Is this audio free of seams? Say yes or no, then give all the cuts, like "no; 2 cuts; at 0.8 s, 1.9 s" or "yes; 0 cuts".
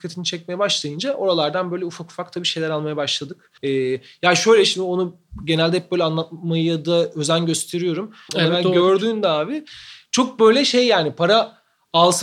no; 2 cuts; at 3.6 s, 8.3 s